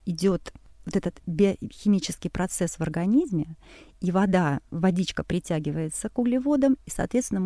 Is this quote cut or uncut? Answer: uncut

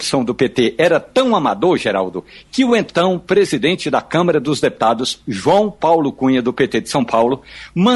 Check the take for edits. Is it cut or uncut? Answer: uncut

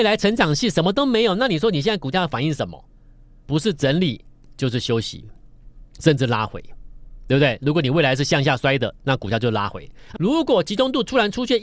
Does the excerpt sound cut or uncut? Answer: cut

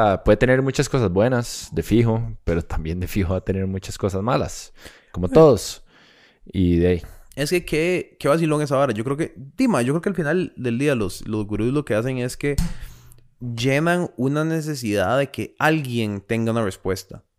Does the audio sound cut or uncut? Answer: uncut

